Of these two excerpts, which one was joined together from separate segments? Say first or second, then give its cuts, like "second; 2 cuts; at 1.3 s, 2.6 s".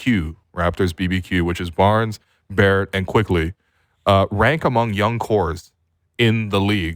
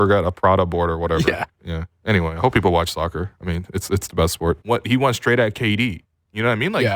second; 1 cut; at 4.6 s